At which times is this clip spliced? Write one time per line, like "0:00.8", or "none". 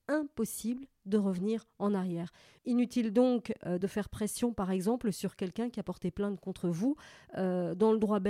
none